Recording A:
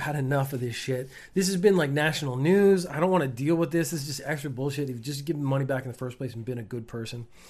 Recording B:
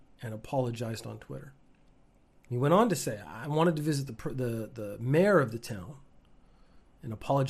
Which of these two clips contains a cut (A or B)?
B